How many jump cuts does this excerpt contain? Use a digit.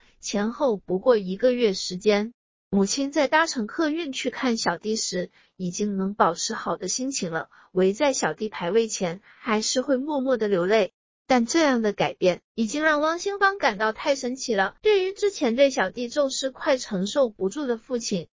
1